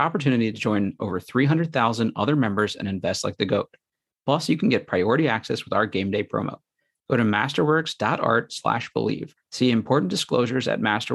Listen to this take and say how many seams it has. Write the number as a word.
one